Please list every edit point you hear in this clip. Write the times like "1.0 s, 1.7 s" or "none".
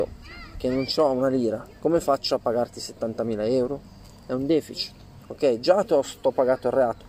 5.2 s